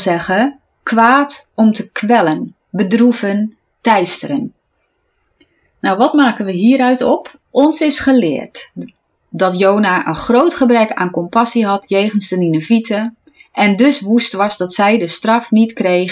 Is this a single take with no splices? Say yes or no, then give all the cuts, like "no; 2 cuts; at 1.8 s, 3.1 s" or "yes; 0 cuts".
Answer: no; 1 cut; at 7.5 s